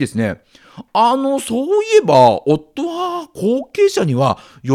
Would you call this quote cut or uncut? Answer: uncut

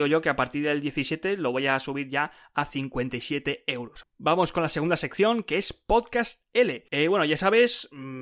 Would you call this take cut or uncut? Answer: cut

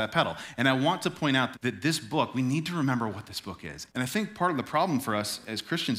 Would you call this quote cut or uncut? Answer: cut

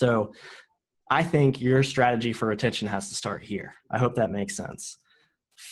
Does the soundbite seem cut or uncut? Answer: cut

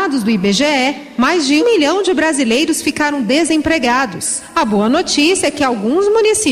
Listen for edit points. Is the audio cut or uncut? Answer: cut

